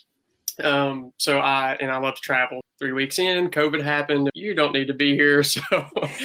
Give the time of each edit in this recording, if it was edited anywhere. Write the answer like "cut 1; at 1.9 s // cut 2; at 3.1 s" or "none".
cut 1; at 2.6 s // cut 2; at 4.3 s